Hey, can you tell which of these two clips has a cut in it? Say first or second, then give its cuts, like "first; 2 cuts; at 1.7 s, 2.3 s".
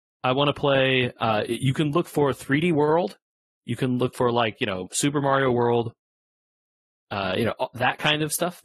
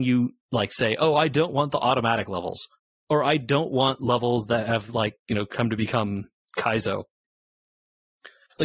first; 1 cut; at 4.9 s